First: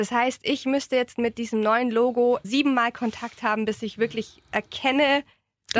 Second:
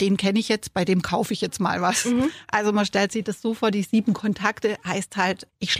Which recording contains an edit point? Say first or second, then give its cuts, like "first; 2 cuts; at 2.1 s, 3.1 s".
first; 1 cut; at 2.4 s